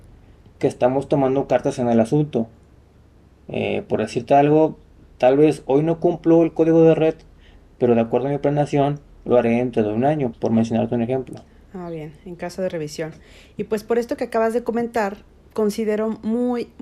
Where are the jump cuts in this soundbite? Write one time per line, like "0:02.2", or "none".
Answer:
0:10.3